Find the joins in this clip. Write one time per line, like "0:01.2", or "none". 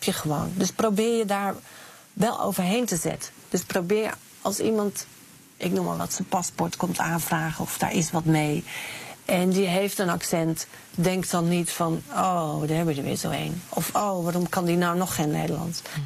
none

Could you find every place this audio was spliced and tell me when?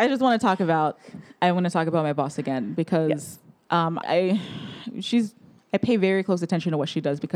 0:04.0

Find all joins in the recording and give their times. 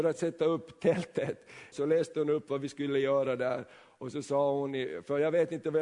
0:01.7

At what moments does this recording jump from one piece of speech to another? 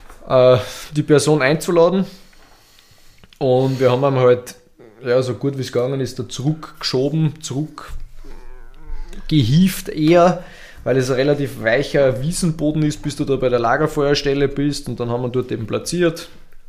none

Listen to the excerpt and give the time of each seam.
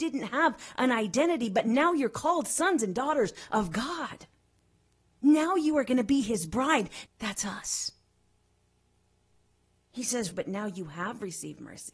0:07.1
0:10.3

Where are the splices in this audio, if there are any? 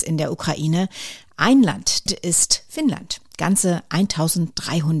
0:02.1

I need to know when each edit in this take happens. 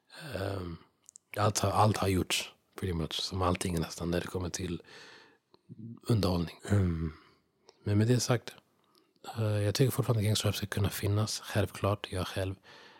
0:06.6

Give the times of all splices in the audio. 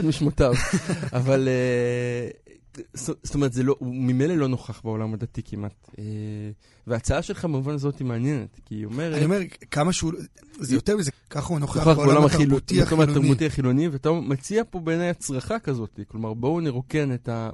0:11.1

